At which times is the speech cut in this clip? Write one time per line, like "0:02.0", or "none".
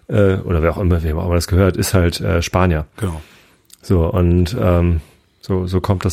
none